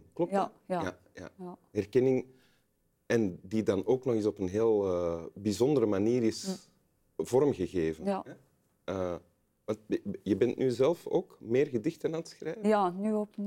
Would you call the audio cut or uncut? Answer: uncut